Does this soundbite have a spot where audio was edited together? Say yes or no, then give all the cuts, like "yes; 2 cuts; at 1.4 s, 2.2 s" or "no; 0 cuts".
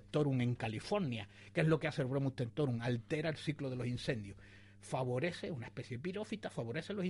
no; 0 cuts